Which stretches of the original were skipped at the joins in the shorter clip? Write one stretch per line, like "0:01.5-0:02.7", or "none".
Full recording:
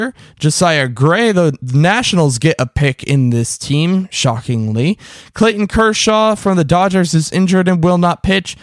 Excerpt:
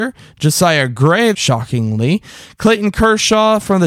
0:01.3-0:04.1